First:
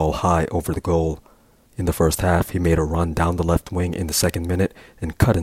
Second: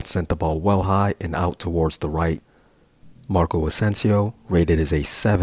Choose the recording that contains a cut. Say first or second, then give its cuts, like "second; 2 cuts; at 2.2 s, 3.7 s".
first; 1 cut; at 1.7 s